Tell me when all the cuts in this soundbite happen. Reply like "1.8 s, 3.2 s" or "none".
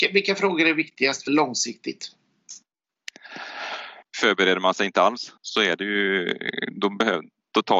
1.3 s, 4.0 s, 5.4 s